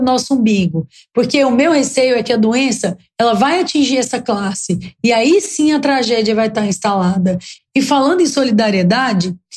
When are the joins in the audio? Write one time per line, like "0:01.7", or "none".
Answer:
0:07.6